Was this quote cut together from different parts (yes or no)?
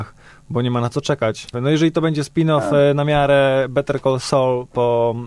yes